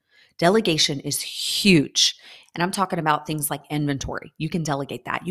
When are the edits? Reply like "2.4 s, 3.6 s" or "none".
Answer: 2.4 s